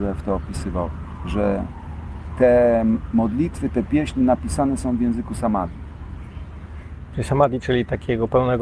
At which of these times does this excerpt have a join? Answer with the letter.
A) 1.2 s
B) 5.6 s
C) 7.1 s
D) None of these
D